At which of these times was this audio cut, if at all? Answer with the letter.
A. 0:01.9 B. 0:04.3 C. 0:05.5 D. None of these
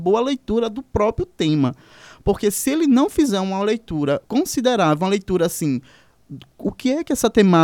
B